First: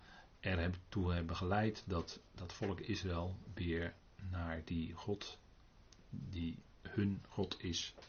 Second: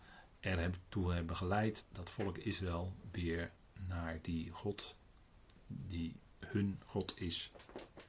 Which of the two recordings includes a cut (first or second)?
second